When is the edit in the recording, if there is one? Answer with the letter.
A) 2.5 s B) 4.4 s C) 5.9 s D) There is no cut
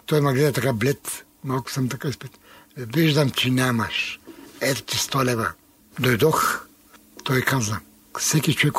C